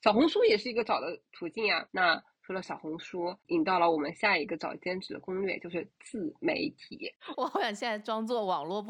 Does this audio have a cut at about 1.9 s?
yes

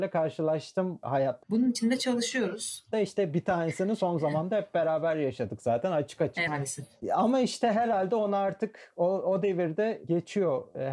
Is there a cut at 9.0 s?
no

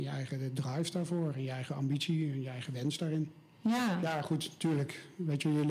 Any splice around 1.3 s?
no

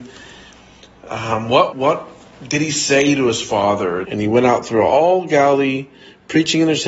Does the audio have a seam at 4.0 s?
yes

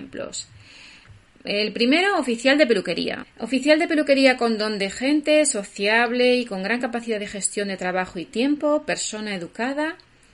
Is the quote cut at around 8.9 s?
no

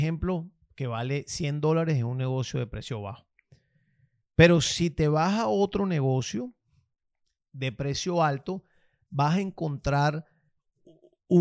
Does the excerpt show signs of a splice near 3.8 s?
no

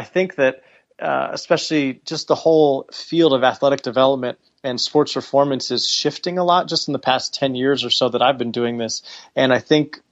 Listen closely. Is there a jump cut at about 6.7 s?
no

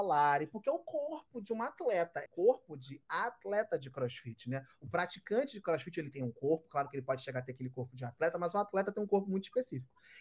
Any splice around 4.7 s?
no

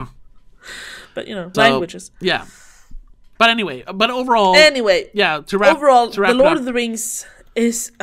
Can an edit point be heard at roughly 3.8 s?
no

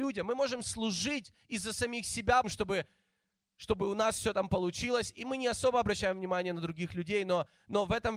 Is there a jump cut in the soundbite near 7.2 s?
no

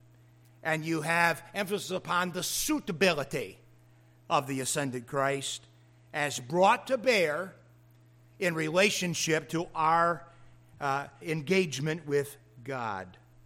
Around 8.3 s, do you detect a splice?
no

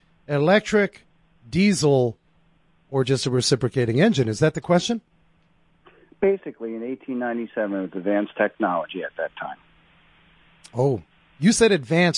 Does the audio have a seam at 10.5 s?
no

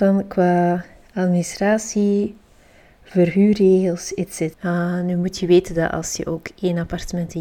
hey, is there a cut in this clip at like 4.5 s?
yes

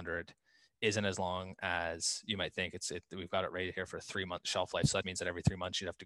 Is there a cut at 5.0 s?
yes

